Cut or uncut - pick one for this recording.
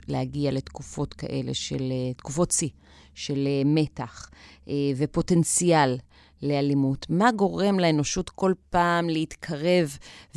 uncut